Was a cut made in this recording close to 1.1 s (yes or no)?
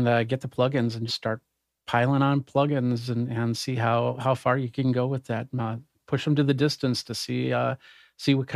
yes